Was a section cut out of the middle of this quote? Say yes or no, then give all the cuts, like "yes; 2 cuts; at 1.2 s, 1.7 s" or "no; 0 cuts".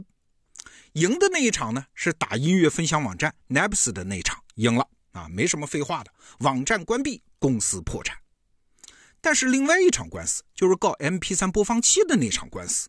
no; 0 cuts